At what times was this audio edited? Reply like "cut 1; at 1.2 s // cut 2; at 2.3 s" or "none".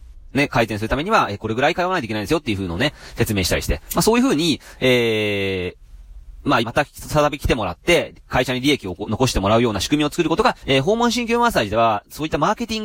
cut 1; at 6.6 s // cut 2; at 10.6 s